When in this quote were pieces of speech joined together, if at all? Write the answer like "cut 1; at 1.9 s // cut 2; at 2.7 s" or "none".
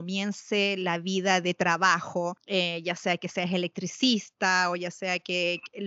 cut 1; at 1.4 s

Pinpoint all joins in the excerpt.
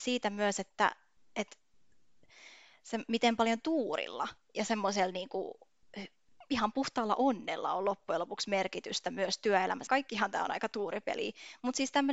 cut 1; at 9.9 s

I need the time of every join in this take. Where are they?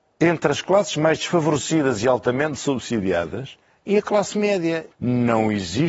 cut 1; at 4.9 s

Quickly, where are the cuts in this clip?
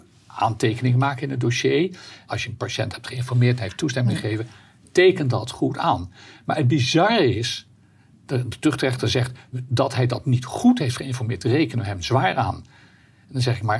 cut 1; at 2.3 s

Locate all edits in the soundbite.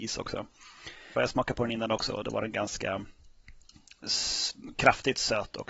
cut 1; at 1.1 s

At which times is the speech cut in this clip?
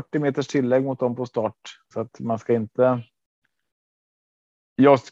cut 1; at 1.9 s

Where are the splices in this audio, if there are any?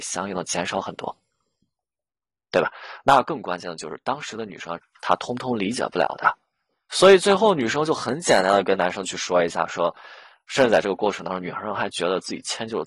cut 1; at 4.8 s

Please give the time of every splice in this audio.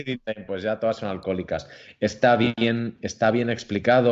none

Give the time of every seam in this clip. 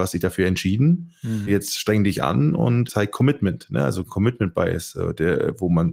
none

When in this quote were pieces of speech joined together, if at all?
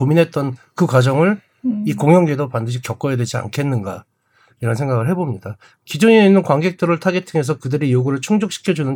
none

